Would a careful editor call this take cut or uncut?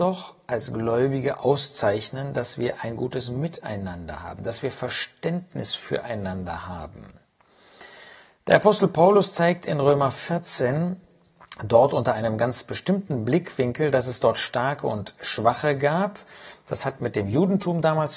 uncut